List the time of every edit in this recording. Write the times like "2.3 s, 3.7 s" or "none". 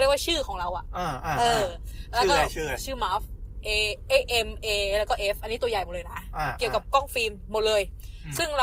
none

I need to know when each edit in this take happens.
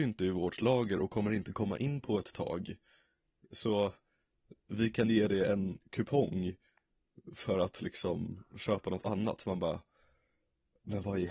none

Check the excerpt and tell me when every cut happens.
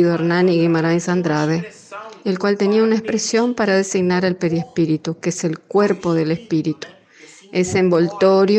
none

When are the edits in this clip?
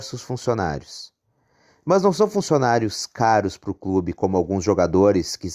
none

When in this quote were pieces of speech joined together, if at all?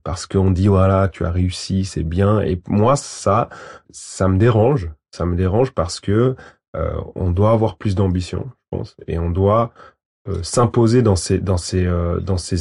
3.8 s

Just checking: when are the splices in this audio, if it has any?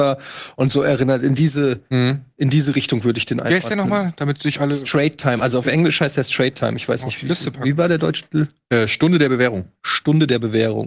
none

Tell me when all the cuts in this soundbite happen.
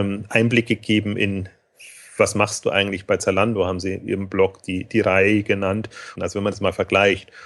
6.2 s

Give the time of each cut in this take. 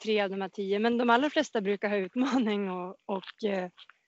none

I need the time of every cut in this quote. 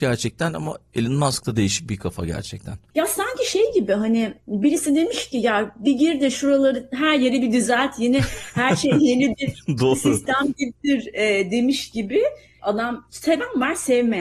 12.5 s

